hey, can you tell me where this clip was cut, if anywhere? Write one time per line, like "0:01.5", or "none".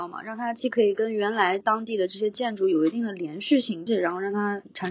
0:03.9